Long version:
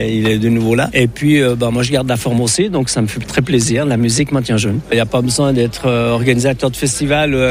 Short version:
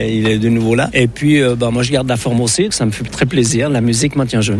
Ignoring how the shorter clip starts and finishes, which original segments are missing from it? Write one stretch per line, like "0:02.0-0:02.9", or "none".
0:02.7-0:02.9